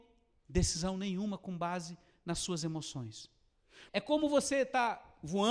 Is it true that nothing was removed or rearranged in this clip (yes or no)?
no